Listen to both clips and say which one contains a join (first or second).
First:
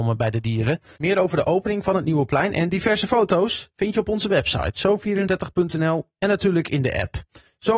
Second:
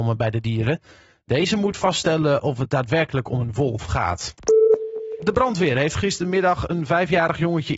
first